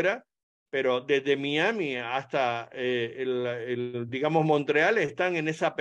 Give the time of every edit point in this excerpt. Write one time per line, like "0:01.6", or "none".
none